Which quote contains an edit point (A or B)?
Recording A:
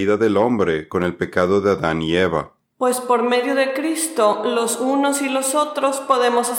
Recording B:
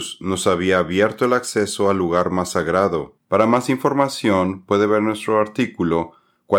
B